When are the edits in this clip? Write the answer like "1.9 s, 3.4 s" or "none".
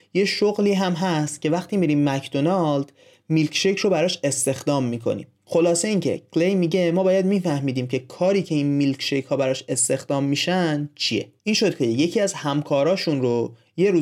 5.3 s, 11.4 s